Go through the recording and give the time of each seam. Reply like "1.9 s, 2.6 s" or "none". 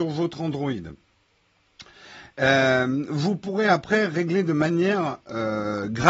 none